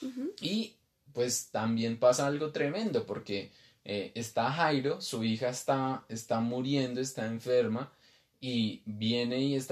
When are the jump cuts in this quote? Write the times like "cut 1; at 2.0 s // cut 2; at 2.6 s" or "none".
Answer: none